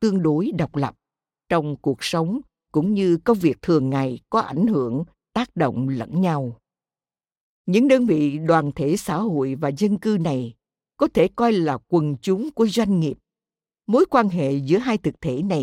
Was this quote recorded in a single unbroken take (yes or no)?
yes